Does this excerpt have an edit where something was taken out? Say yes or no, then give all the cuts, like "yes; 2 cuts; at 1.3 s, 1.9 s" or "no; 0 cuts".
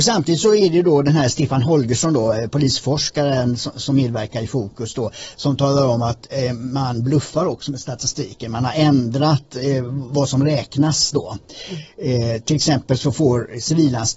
no; 0 cuts